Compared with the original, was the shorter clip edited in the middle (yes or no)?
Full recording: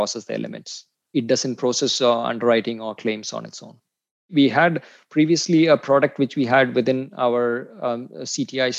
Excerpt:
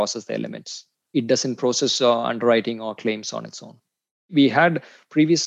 no